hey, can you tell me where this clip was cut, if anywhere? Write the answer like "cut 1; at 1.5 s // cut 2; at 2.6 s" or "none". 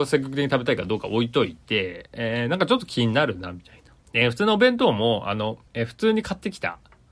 cut 1; at 4.0 s // cut 2; at 5.7 s